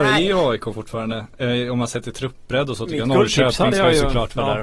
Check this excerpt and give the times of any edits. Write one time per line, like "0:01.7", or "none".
none